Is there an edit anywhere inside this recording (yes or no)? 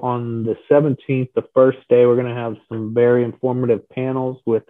no